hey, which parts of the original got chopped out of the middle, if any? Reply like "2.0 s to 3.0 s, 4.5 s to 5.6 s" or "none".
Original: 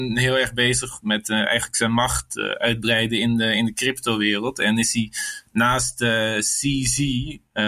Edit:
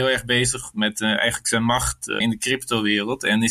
2.5 s to 3.6 s

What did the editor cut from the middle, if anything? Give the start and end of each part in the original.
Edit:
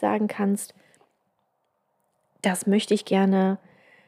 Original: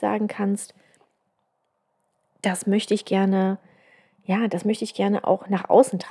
none

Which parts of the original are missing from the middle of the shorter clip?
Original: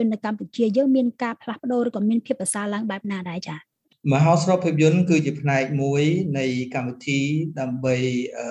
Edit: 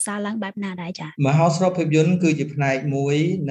3.6 s to 4.0 s

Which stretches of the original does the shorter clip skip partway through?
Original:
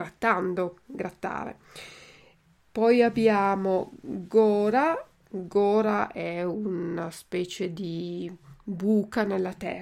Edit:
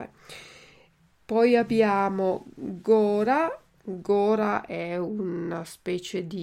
none

